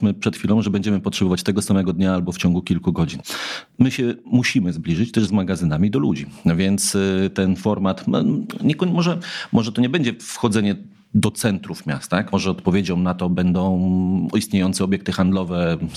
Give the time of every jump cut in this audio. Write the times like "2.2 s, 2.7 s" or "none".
none